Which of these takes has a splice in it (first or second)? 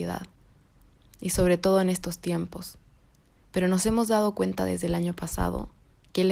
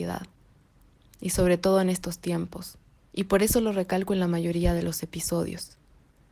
second